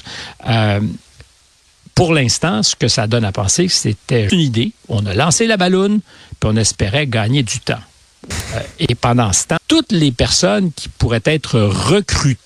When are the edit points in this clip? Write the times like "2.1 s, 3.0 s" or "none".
4.3 s, 8.3 s, 9.6 s